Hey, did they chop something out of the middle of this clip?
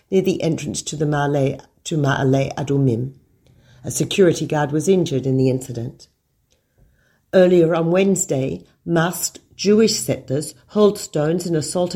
no; 0 cuts

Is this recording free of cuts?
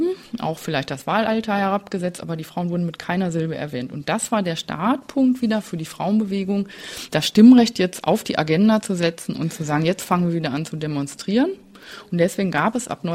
yes; 0 cuts

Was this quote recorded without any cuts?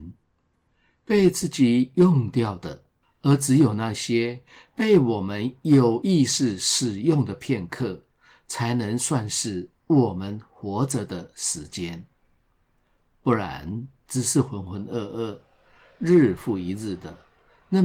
no; 1 cut; at 3.0 s

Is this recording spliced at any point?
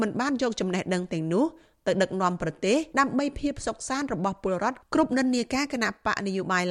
yes; 1 cut; at 2.9 s

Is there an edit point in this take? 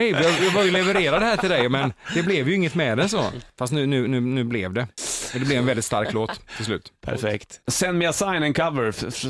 no; 0 cuts

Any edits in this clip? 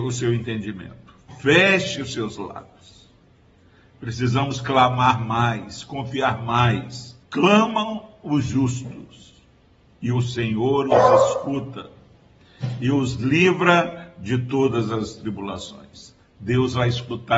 yes; 1 cut; at 7.2 s

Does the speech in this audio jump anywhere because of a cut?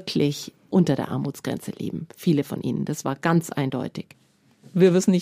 no; 0 cuts

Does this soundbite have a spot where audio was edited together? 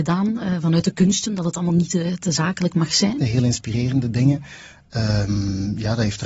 yes; 1 cut; at 3.2 s

